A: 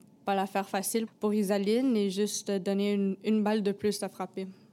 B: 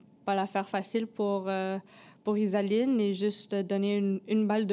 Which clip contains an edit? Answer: A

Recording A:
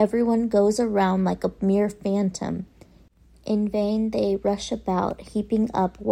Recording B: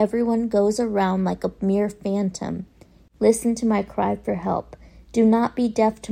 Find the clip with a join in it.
B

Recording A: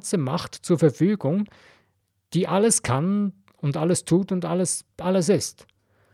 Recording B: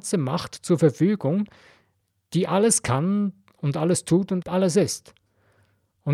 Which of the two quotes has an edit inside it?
B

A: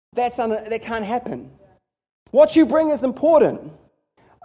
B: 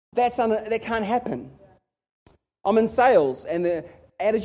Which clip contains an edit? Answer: A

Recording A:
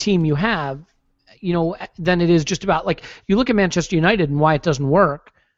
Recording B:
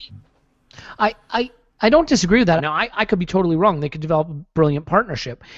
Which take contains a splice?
B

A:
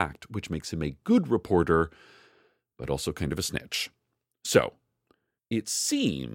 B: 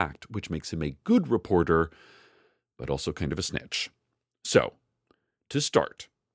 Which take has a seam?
A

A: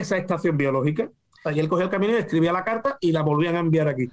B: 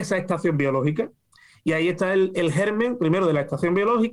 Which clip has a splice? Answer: A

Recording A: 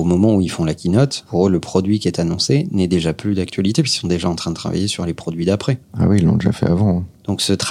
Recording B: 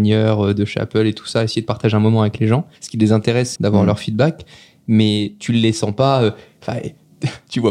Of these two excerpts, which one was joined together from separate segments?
B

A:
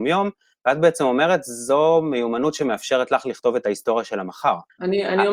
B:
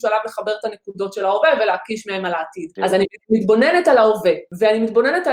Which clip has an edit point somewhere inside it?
B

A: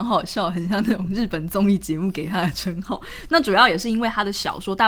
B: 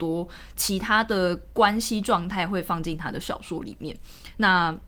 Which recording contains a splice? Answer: A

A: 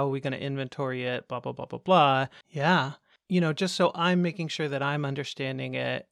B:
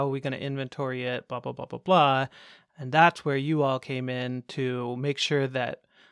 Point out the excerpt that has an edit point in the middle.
A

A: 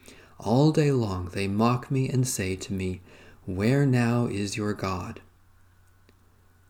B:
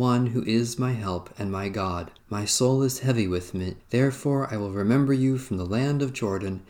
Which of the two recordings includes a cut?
B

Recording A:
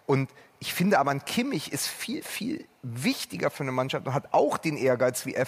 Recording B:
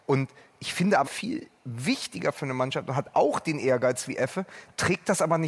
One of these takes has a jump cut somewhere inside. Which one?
B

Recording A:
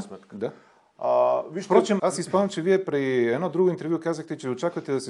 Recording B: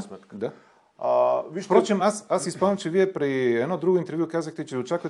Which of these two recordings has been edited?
A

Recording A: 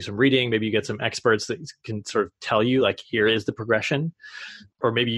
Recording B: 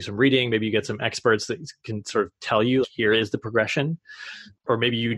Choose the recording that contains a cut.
B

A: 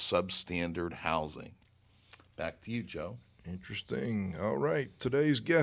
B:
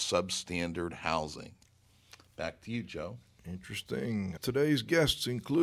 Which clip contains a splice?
B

